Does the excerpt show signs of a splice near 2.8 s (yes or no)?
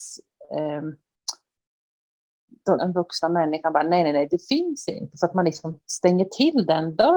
yes